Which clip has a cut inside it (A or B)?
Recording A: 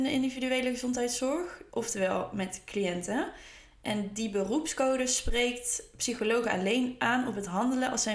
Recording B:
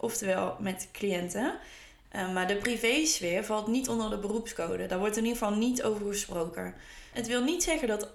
B